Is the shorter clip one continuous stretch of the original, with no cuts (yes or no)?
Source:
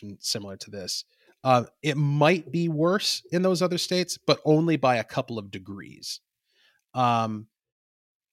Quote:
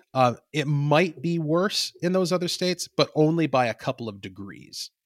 yes